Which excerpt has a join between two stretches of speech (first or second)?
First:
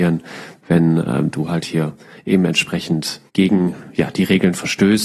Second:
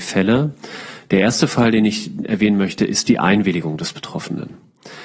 first